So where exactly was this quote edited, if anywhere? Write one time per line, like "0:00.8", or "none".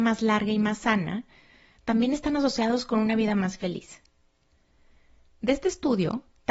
none